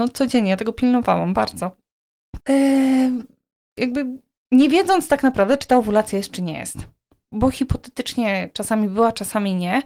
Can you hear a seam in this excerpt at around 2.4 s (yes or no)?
yes